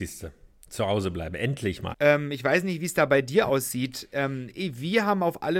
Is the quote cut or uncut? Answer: cut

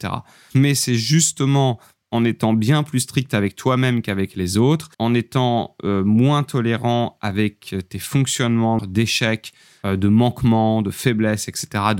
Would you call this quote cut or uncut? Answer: cut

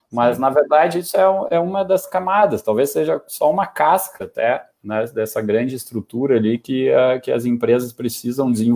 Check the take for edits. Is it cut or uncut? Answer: uncut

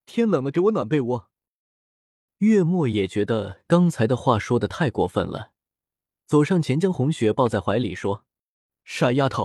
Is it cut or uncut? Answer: cut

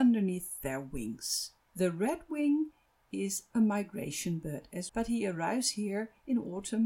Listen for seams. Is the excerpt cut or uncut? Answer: cut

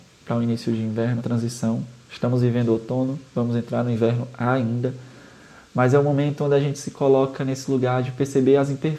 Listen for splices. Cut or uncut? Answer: cut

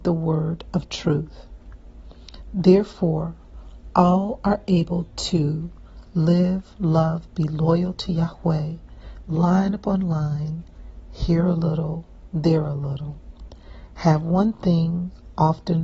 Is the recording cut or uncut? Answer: cut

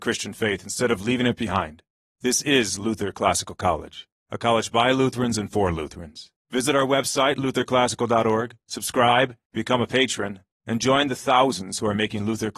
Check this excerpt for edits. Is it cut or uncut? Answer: uncut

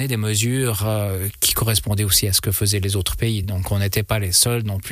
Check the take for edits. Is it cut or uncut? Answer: uncut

